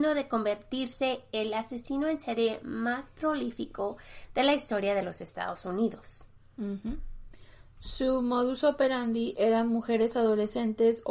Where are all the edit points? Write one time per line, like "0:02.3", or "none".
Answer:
none